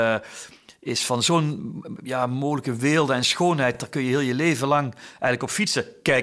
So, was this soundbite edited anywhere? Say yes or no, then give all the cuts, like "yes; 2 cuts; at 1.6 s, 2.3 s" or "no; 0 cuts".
no; 0 cuts